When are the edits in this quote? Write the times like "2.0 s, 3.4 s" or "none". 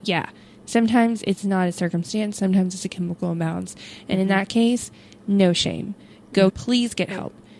6.5 s